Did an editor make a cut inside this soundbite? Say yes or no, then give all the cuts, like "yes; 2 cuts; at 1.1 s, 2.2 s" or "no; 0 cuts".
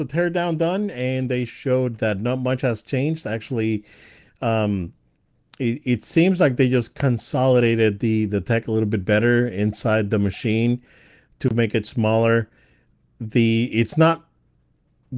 no; 0 cuts